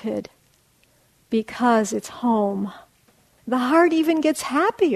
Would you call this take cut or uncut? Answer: cut